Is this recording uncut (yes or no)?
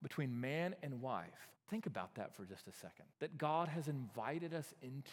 no